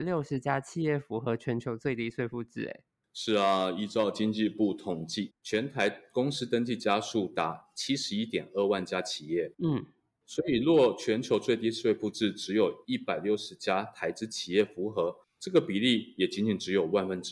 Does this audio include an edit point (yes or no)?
yes